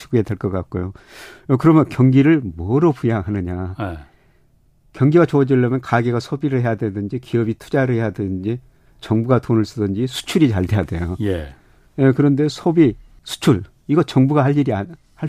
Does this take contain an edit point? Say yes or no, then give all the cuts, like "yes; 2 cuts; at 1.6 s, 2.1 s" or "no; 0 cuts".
yes; 1 cut; at 13.2 s